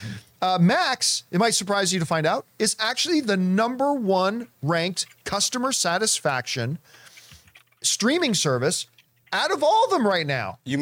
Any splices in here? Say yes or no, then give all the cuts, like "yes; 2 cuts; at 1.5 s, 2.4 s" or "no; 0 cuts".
no; 0 cuts